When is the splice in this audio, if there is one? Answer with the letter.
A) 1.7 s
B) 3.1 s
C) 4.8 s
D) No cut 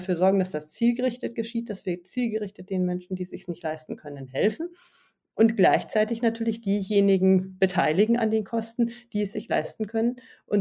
D